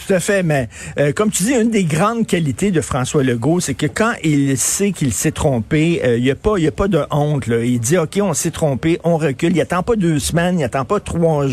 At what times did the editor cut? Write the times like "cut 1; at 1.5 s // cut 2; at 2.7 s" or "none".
none